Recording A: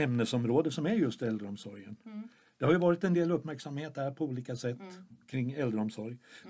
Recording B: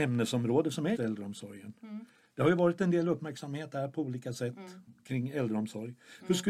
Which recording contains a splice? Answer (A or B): B